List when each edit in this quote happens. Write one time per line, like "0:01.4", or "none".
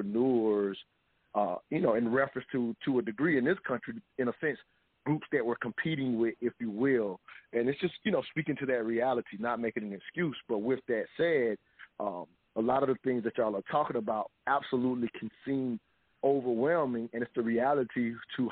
none